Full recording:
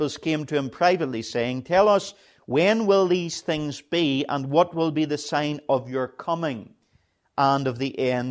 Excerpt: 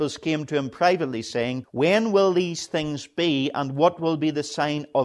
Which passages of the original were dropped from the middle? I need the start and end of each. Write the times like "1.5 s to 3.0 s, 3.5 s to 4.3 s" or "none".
1.6 s to 2.4 s